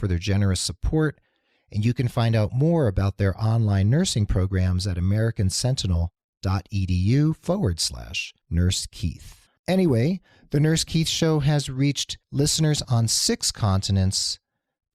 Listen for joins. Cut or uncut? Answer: cut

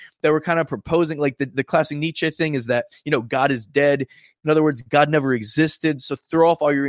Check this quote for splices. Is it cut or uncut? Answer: cut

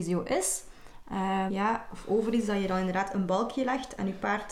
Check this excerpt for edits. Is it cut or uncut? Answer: cut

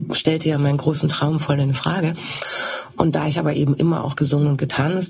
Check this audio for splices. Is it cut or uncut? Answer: uncut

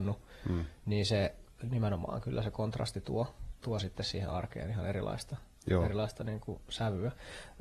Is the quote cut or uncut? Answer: cut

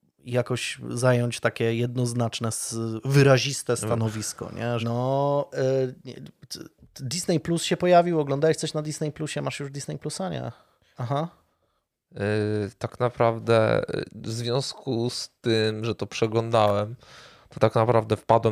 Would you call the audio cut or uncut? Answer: cut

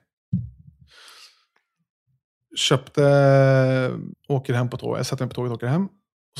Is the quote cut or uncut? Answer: cut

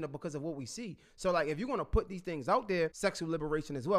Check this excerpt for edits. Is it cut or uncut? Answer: cut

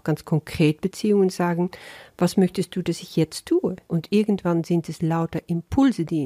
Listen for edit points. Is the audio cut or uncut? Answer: cut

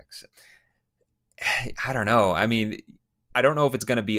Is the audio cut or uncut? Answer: uncut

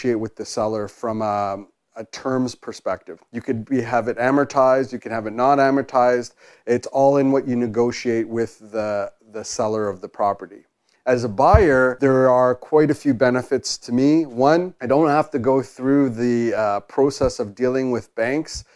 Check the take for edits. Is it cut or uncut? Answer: cut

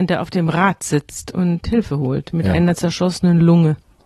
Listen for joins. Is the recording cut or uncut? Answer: uncut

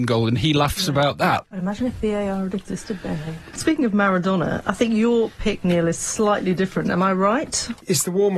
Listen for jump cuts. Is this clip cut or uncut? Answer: uncut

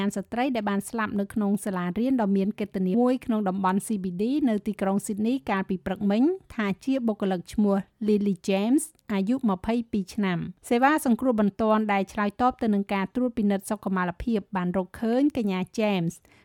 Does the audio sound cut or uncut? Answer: cut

